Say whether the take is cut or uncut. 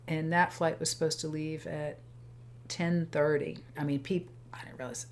cut